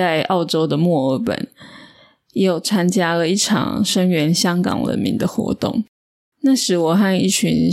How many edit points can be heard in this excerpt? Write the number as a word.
zero